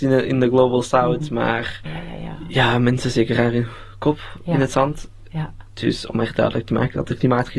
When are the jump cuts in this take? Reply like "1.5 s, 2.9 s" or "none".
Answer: 1.9 s